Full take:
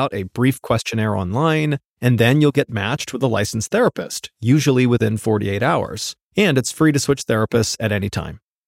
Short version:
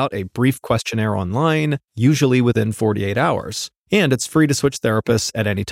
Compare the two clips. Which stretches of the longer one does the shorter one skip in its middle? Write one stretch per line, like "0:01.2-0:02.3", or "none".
0:01.9-0:04.3